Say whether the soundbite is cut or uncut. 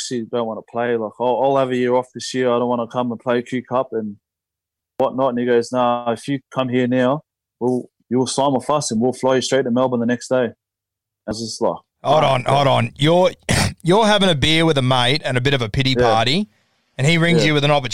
uncut